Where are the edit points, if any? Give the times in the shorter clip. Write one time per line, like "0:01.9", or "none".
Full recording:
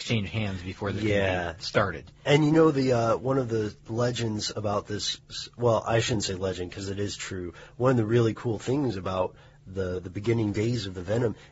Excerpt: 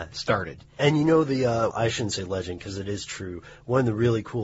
0:01.7